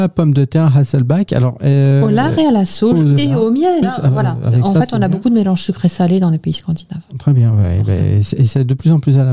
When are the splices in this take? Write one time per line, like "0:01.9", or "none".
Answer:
0:03.8